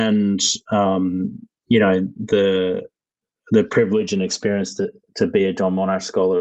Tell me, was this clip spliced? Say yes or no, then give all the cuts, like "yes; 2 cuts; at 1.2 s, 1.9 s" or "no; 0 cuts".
no; 0 cuts